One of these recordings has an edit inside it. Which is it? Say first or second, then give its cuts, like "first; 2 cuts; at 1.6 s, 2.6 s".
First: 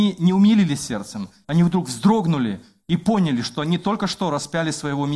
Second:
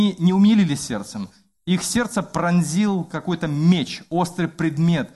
first; 1 cut; at 1.4 s